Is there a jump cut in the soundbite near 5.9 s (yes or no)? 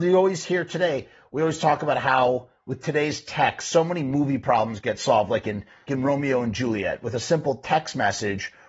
yes